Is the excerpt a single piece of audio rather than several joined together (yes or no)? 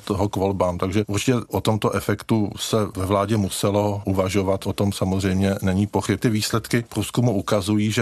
no